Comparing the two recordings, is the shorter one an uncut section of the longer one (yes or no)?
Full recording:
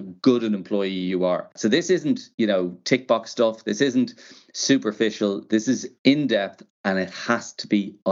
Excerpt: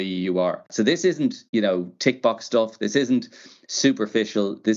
yes